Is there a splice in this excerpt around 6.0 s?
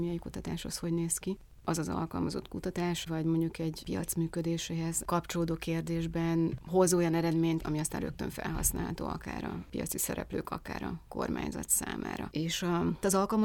no; 3 cuts; at 3.1 s, 7.6 s, 12.3 s

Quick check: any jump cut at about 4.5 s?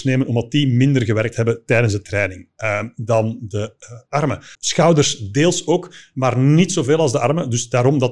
yes; 1 cut; at 4.5 s

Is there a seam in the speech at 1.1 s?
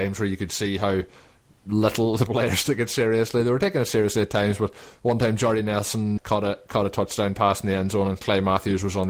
no; 1 cut; at 6.2 s

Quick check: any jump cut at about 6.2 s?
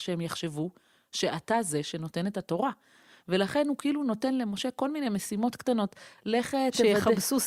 yes; 1 cut; at 6.2 s

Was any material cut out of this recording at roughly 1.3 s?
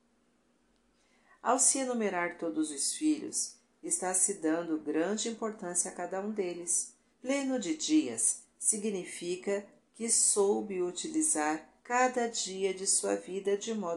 no; 2 cuts; at 7.1 s, 11.8 s

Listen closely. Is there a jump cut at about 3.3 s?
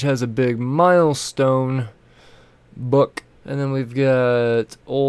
yes; 1 cut; at 3.3 s

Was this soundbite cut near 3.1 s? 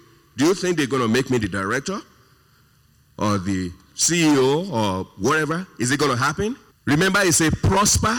no; 1 cut; at 6.7 s

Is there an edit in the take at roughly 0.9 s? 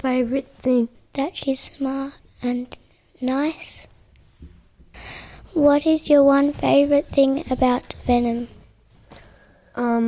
yes; 1 cut; at 0.9 s

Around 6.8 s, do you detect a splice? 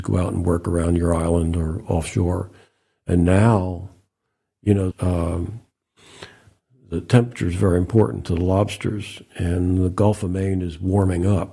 no; 1 cut; at 4.9 s

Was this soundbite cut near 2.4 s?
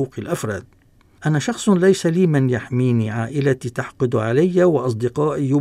no; 1 cut; at 1.2 s

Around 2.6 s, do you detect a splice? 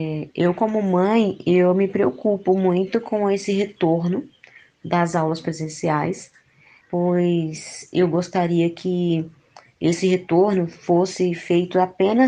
no; 1 cut; at 6.8 s

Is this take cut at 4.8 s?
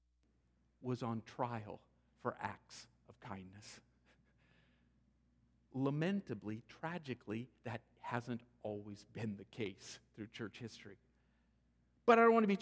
no; 0 cuts

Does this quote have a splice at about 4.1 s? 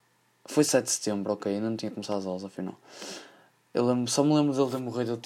no; 0 cuts

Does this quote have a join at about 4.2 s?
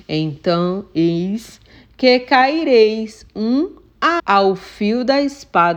yes; 1 cut; at 4.2 s

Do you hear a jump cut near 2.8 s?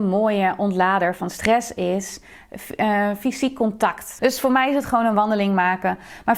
no; 1 cut; at 4.2 s

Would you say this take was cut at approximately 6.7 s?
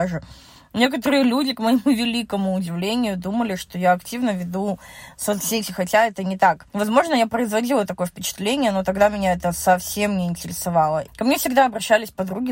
yes; 2 cuts; at 6.7 s, 11.1 s

